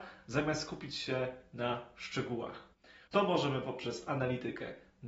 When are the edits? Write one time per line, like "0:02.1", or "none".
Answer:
0:03.1